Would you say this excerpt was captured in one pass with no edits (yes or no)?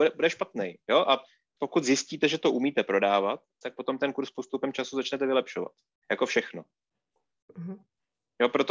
no